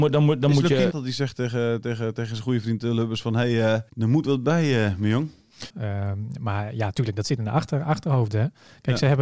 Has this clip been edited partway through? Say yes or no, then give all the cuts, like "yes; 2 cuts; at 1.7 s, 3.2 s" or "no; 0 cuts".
yes; 3 cuts; at 0.9 s, 3.9 s, 5.7 s